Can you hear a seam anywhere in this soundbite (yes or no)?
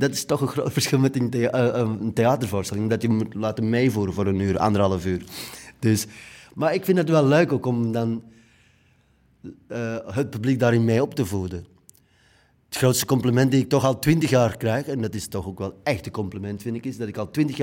no